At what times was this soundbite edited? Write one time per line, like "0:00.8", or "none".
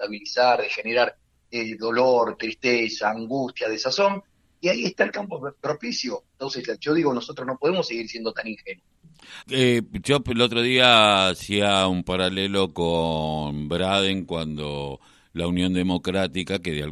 0:09.4